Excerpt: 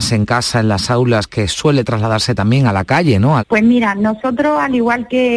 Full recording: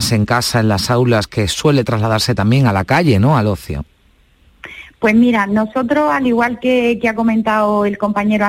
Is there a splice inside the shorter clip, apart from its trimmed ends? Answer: yes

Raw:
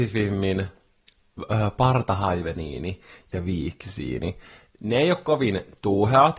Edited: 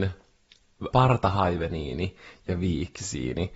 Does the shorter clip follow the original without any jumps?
no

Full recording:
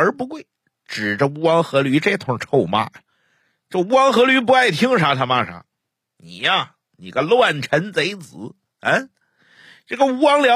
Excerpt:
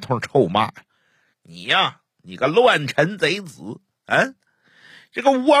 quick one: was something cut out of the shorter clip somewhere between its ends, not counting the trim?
yes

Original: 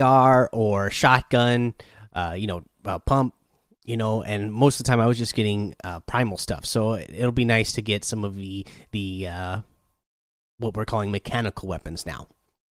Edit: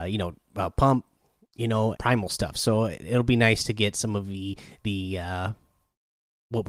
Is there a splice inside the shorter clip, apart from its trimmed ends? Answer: yes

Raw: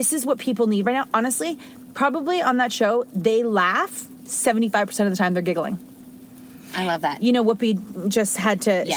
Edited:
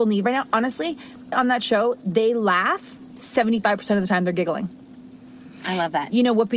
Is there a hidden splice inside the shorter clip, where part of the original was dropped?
yes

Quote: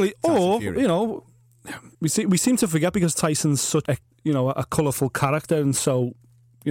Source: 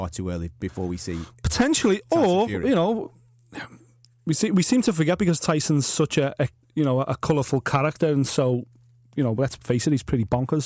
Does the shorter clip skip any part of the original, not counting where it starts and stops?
yes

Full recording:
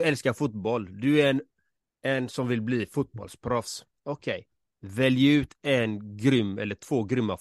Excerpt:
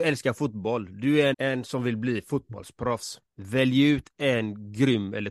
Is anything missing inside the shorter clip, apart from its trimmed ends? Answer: yes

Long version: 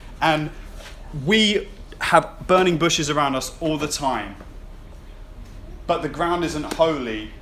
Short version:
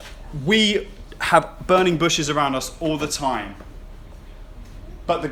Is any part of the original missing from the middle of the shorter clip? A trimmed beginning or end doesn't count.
no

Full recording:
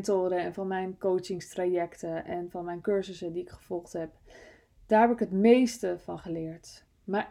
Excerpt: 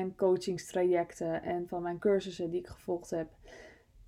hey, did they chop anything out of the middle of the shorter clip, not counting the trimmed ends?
no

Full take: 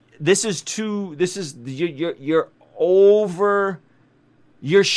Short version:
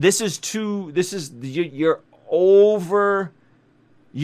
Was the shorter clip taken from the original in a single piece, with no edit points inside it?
no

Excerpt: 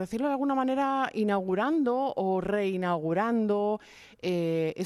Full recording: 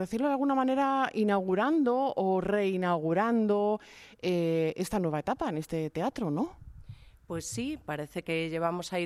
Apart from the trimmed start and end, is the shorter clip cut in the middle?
no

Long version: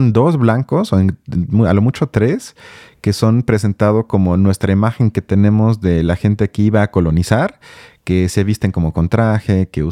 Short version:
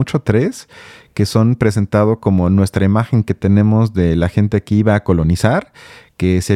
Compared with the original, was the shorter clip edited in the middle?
no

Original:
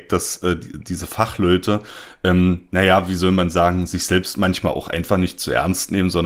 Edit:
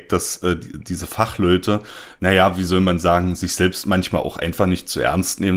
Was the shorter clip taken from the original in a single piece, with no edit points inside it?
no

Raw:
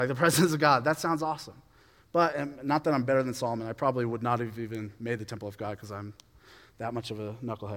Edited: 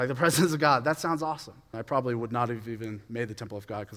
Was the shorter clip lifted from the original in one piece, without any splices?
no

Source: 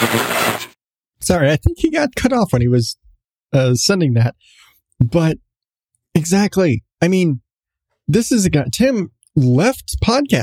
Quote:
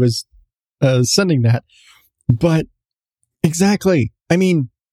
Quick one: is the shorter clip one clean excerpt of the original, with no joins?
yes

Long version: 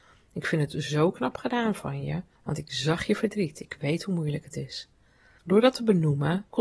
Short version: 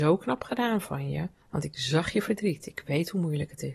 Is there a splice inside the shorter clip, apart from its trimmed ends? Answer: no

